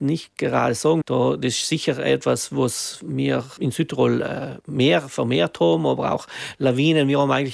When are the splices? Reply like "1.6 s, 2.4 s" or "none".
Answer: 1.0 s, 3.6 s

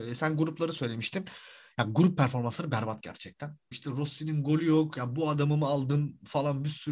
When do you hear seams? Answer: 3.7 s

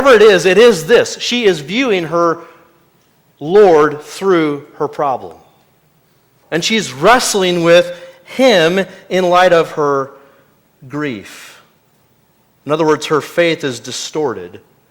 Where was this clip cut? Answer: 6.4 s

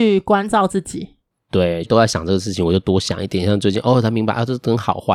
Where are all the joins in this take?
1.8 s

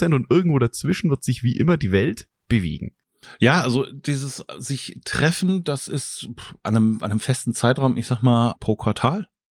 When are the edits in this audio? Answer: 8.6 s

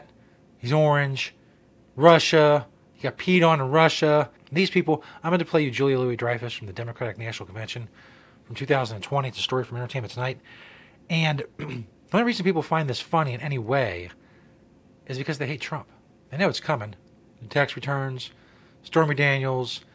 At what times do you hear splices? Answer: 4.4 s

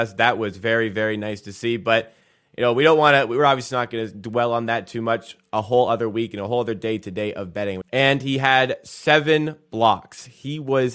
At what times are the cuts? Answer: 7.8 s

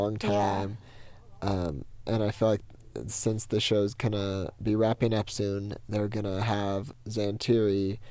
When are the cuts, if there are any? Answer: none

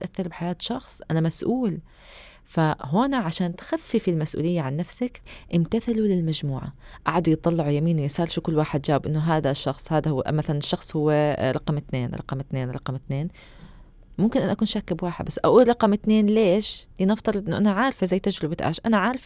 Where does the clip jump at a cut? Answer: 16.9 s

